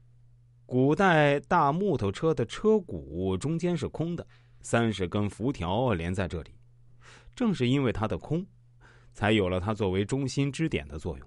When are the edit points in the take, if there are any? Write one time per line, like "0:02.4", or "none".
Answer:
none